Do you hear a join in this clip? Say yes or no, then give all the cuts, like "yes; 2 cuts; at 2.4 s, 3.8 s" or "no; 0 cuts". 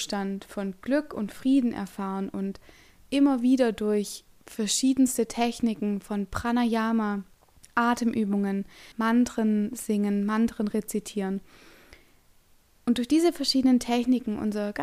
yes; 1 cut; at 8.9 s